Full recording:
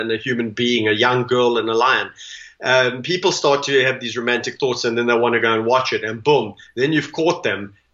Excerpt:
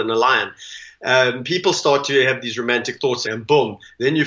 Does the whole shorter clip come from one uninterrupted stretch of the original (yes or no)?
no